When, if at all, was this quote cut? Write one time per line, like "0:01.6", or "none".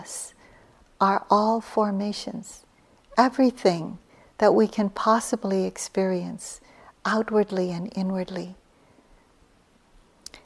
none